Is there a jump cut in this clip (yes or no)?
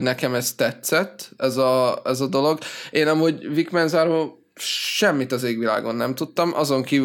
no